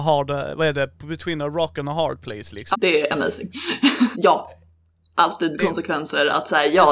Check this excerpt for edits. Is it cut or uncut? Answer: cut